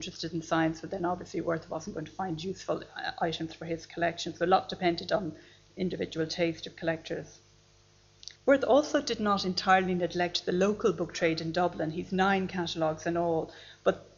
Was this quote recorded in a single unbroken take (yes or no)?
no